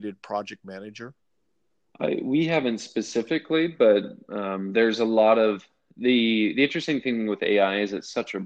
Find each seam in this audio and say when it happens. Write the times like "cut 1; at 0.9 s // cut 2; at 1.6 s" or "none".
none